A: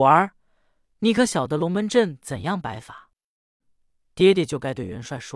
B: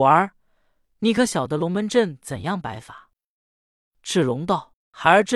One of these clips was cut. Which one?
A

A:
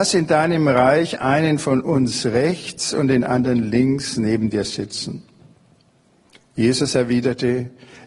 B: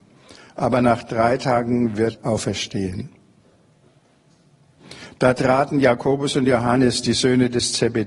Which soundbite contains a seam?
B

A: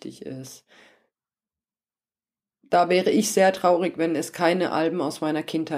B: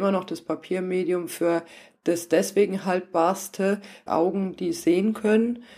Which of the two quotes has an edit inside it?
B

